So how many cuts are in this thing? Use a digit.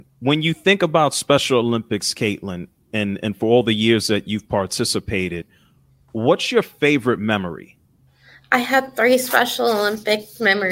0